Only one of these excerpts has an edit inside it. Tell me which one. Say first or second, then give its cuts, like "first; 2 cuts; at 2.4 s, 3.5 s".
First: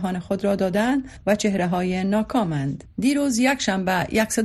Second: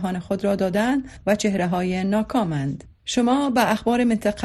first; 1 cut; at 2.9 s